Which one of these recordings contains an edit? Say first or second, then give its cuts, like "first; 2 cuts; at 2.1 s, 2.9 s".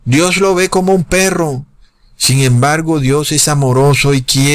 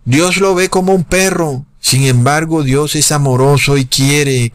second; 1 cut; at 1.7 s